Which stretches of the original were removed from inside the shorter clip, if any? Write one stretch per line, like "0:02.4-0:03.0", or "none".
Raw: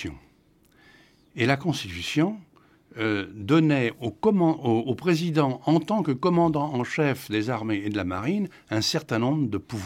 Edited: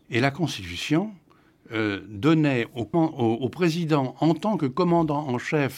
0:04.2-0:04.4